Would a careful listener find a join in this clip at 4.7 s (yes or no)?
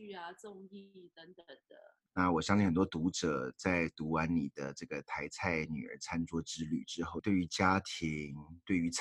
no